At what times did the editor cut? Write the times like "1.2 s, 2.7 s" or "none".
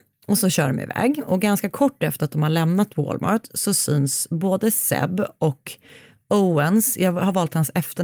none